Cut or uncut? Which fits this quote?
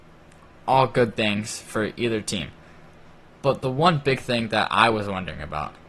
uncut